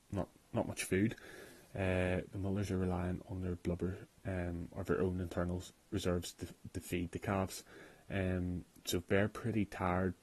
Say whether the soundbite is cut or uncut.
uncut